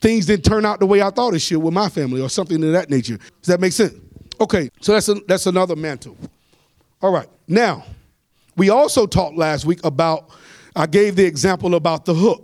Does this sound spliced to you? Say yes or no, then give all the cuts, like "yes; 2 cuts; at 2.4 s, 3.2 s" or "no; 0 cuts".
yes; 2 cuts; at 3.3 s, 4.7 s